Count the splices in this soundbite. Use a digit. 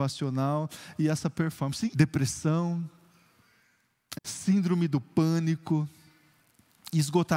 2